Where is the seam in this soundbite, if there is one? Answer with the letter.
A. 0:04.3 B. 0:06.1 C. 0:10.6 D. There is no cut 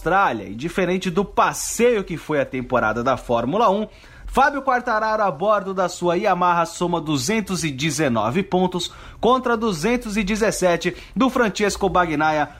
A